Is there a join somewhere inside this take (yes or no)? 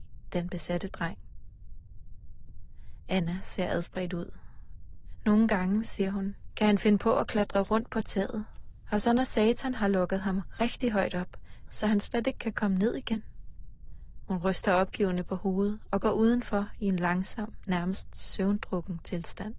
yes